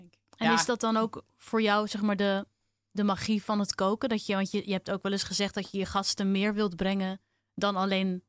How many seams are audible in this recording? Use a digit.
0